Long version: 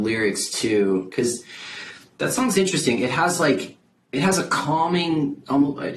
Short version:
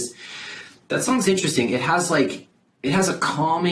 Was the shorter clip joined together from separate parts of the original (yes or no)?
no